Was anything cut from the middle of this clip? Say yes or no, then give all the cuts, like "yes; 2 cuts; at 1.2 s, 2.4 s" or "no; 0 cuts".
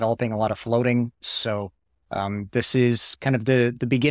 yes; 1 cut; at 1.2 s